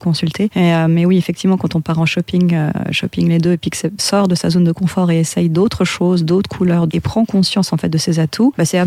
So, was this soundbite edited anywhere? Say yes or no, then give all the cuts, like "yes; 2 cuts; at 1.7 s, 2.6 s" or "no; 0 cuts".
yes; 2 cuts; at 4.0 s, 6.9 s